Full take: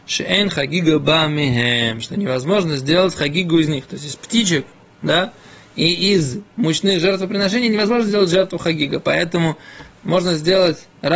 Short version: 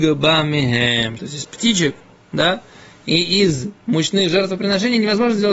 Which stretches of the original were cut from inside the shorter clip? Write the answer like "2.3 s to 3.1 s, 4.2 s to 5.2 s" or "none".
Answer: 2.0 s to 3.9 s